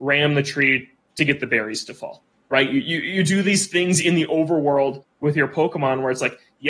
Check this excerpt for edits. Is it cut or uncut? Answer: uncut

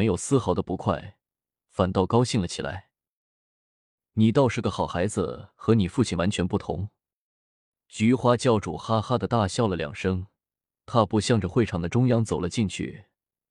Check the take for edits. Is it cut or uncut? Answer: uncut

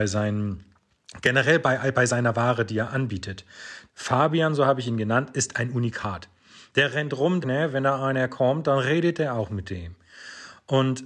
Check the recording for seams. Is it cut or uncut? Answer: cut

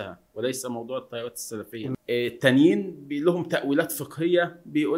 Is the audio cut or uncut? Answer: cut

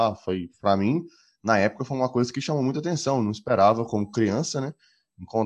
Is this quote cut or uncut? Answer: uncut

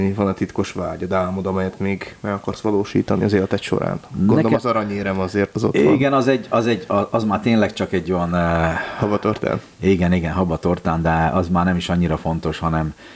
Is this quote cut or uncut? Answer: cut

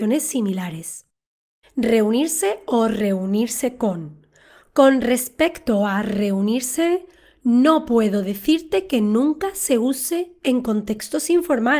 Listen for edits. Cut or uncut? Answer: cut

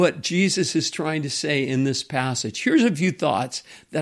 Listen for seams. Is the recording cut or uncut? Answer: uncut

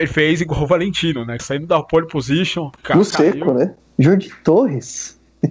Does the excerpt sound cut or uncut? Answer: cut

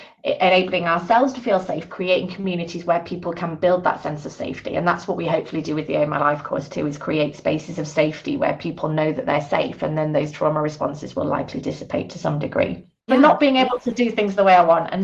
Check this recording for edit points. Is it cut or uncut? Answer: cut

